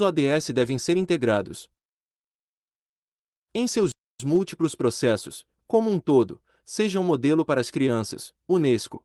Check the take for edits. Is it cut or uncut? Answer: cut